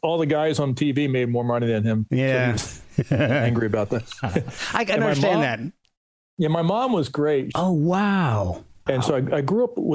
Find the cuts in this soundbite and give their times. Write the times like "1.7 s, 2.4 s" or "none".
7.5 s, 8.9 s